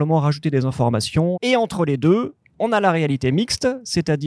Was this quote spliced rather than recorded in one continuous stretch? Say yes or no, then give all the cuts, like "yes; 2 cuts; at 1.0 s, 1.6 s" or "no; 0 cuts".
yes; 1 cut; at 1.3 s